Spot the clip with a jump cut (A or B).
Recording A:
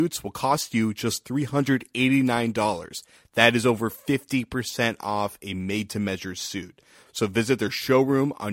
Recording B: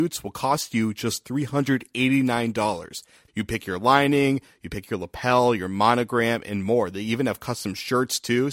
B